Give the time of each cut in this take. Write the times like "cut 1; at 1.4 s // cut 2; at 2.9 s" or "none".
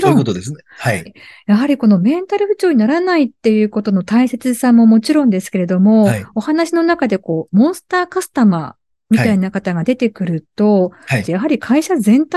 cut 1; at 1.1 s // cut 2; at 11.2 s

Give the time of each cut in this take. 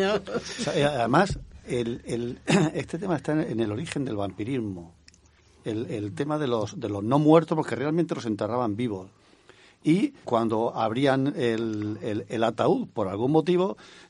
cut 1; at 10.2 s

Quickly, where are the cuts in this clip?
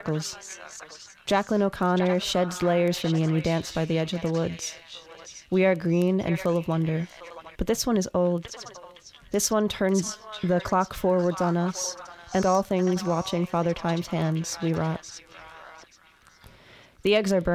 cut 1; at 7.5 s // cut 2; at 12.4 s

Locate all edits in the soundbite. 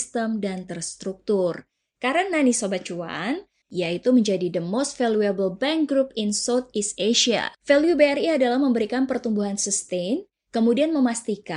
cut 1; at 3.6 s // cut 2; at 7.5 s

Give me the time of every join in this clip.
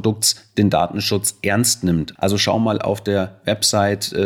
cut 1; at 2.2 s

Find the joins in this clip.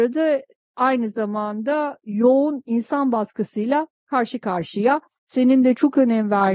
cut 1; at 5.1 s

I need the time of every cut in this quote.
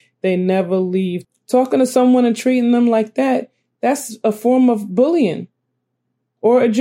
cut 1; at 1.2 s

